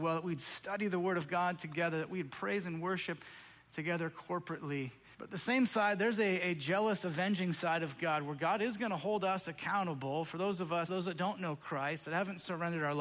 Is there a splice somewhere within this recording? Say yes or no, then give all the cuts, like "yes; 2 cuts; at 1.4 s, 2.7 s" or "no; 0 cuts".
yes; 2 cuts; at 5.1 s, 10.9 s